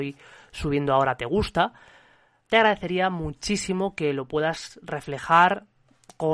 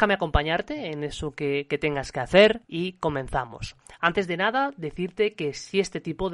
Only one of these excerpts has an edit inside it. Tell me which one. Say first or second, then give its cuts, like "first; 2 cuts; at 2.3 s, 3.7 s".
second; 1 cut; at 2.6 s